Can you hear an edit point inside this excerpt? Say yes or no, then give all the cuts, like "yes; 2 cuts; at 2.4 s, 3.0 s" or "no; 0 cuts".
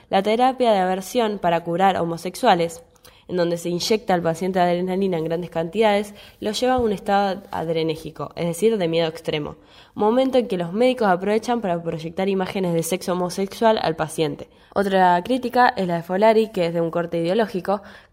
yes; 1 cut; at 14.7 s